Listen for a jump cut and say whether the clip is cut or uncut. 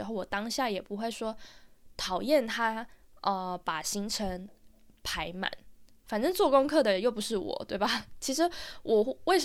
uncut